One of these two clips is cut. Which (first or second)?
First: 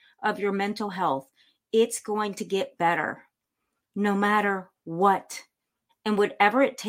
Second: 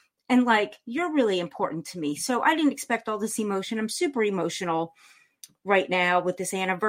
first